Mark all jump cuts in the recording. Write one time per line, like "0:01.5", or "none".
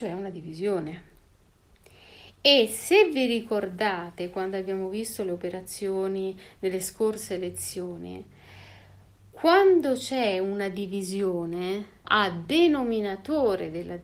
0:12.0